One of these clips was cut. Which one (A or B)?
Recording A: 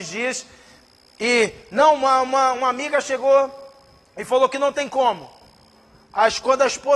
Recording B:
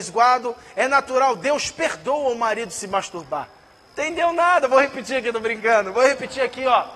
B